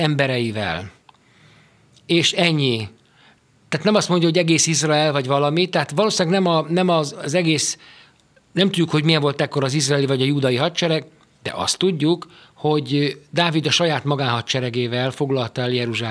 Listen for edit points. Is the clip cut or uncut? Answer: uncut